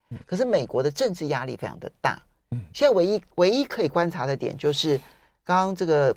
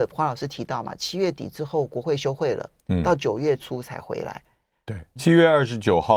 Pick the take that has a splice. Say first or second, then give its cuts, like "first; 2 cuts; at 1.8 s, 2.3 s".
second; 1 cut; at 5.2 s